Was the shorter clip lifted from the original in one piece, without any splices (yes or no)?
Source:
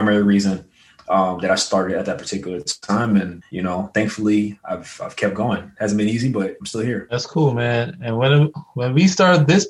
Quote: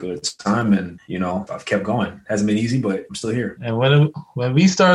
no